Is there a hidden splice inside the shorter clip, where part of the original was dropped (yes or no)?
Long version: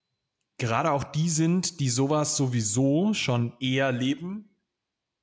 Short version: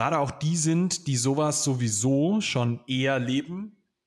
no